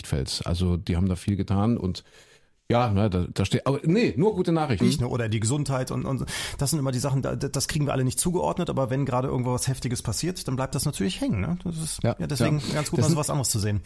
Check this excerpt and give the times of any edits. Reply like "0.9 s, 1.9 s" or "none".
4.8 s

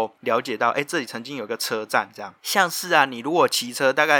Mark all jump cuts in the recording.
2.4 s

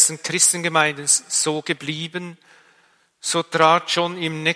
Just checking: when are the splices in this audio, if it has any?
none

